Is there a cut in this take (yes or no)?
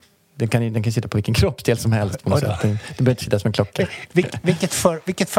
no